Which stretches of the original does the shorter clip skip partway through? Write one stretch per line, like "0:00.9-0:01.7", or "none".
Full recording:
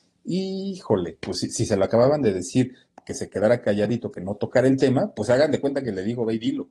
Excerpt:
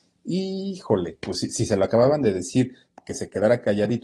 none

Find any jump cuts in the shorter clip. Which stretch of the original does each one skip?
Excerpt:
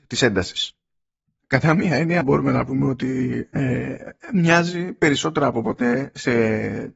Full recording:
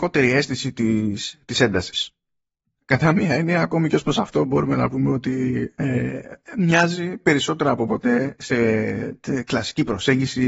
0:03.6-0:04.5

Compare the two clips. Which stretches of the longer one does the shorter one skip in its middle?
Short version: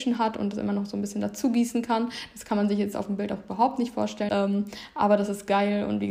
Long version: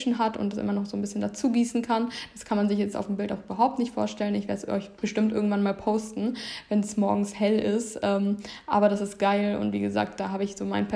0:04.3-0:08.0

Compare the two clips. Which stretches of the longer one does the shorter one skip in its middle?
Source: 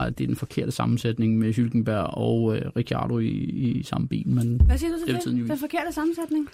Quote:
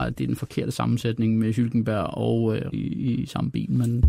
0:02.7-0:03.3

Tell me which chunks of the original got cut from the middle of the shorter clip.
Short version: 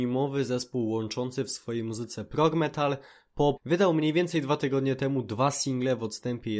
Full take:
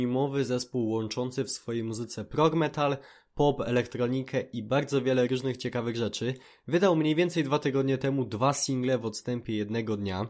0:03.6-0:06.6

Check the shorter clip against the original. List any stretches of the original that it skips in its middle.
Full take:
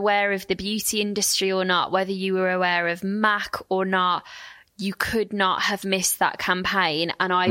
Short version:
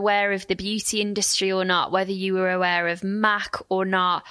none

